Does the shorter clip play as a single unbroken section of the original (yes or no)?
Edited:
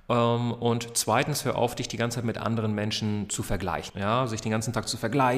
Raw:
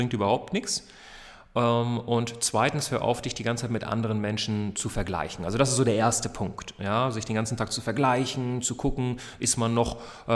no